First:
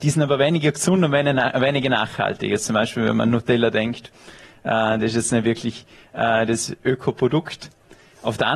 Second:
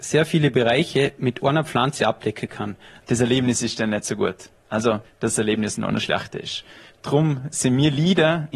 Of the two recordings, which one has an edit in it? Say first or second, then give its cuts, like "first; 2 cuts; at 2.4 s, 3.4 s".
second; 3 cuts; at 3.0 s, 5.0 s, 6.9 s